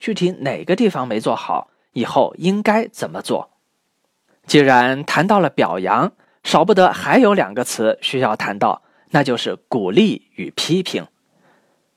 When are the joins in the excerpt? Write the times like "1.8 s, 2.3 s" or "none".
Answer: 4.3 s